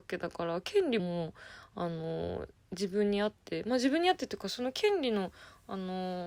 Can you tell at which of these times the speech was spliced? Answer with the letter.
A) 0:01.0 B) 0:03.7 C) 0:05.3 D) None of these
A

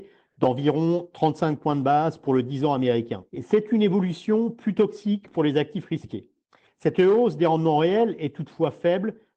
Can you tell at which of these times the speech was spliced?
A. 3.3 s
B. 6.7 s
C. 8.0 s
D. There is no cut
A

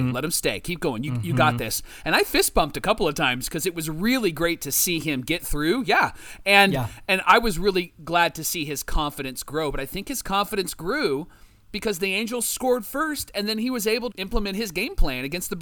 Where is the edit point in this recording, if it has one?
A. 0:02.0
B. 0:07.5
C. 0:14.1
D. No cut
C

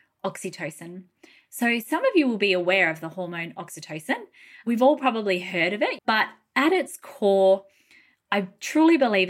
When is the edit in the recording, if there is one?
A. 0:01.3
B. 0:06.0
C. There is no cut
B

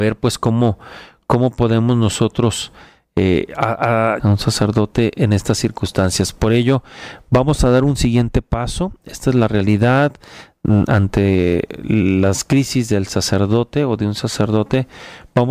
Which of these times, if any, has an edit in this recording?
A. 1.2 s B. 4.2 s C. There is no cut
B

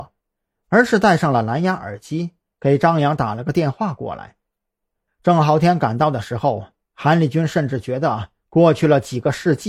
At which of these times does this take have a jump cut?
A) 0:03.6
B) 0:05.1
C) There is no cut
B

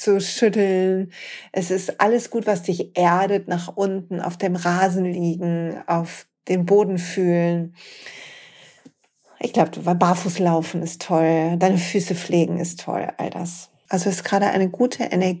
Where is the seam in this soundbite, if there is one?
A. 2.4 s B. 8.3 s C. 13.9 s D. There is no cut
C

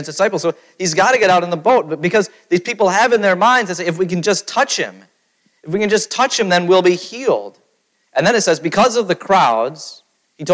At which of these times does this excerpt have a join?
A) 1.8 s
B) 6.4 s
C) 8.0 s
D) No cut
C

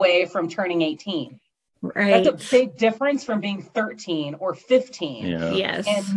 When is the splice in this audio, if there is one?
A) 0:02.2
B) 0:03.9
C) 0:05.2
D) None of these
D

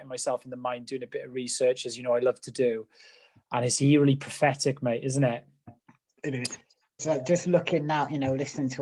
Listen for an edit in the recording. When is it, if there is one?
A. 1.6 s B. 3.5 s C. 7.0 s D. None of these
C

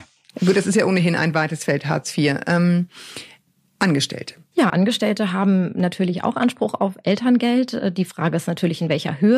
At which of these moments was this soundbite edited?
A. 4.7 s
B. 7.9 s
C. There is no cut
A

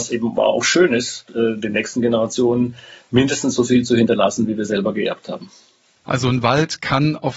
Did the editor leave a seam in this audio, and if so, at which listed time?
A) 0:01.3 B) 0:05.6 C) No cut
A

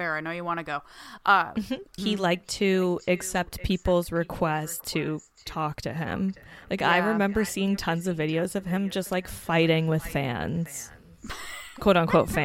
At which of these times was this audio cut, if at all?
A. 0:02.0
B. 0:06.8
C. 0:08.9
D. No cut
A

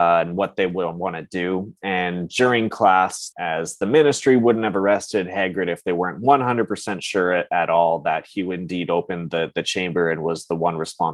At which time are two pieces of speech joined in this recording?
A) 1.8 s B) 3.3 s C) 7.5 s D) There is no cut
B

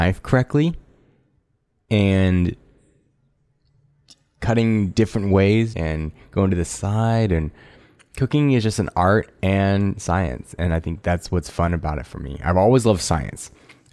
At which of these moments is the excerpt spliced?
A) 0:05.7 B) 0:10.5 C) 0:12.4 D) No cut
A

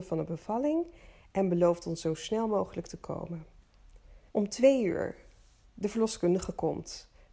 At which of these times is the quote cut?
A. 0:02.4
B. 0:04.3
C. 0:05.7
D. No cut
B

